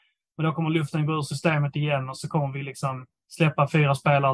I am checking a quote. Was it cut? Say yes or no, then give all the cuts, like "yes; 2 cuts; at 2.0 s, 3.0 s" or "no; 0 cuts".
no; 0 cuts